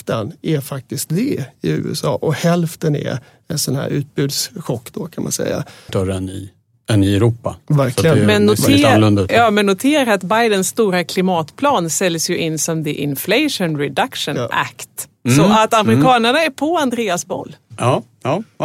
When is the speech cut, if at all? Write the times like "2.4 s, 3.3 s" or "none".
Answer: 5.9 s